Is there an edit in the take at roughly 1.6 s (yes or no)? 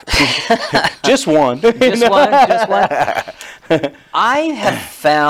no